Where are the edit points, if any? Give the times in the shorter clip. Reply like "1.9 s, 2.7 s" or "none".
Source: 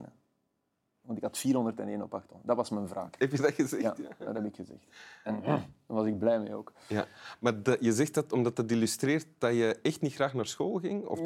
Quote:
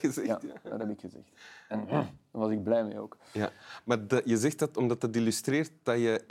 none